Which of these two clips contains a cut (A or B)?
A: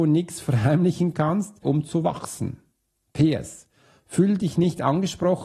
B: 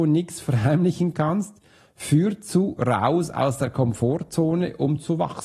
A